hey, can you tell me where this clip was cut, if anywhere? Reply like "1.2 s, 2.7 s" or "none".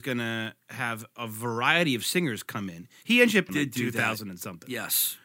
3.5 s